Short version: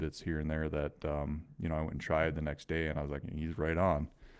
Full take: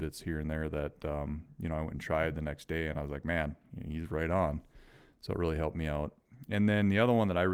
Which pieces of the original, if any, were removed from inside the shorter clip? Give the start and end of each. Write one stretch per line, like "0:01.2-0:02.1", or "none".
0:03.2-0:03.8